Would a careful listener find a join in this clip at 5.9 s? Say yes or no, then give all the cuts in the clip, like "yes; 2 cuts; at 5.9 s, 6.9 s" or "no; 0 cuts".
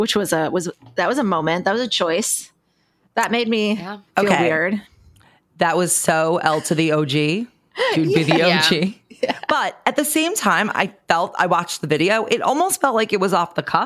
no; 0 cuts